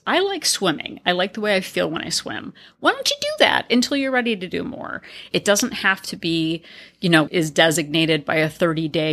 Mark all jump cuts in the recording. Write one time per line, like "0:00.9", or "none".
0:05.3
0:07.3